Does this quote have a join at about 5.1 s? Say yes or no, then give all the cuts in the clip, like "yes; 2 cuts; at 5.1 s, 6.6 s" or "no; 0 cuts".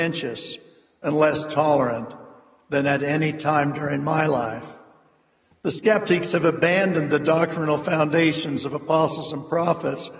no; 0 cuts